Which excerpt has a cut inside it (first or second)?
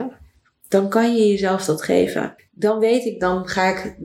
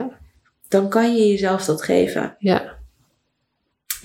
first